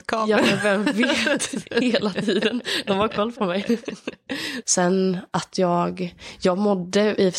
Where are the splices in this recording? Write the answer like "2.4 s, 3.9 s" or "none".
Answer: 4.6 s